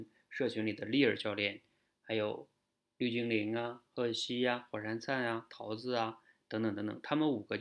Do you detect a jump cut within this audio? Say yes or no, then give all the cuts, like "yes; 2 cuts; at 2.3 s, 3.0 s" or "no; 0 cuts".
no; 0 cuts